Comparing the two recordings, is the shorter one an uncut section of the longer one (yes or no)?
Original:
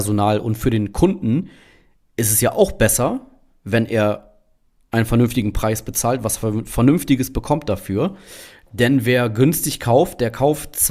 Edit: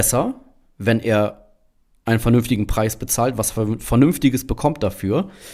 yes